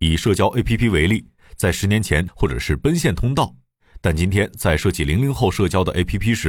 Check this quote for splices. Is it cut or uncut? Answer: cut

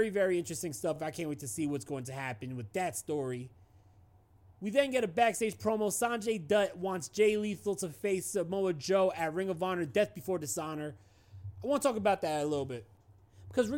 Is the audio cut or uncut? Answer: uncut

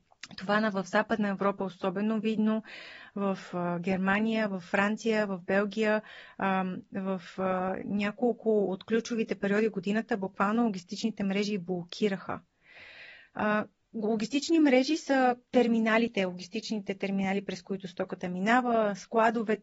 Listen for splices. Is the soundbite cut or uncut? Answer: uncut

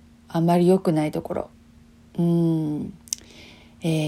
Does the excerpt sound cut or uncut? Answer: uncut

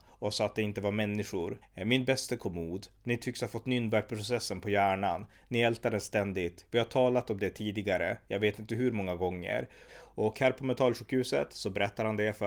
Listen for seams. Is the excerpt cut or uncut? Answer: cut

